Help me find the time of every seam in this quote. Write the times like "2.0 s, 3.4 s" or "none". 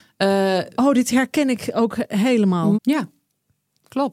2.7 s